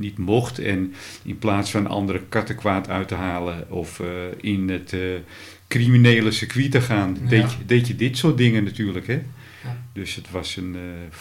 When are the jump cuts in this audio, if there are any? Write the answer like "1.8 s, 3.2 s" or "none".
none